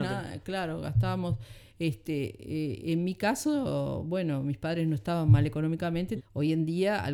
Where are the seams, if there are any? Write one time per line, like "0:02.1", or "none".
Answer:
0:06.2